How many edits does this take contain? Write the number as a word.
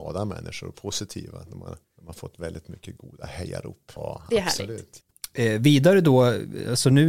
two